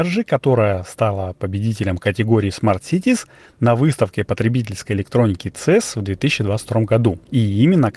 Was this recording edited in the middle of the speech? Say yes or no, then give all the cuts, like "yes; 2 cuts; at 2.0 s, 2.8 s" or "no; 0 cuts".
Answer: no; 0 cuts